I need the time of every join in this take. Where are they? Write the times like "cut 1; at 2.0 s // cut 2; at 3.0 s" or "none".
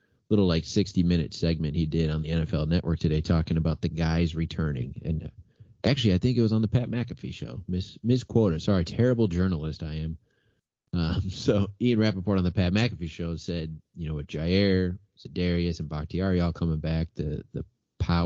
none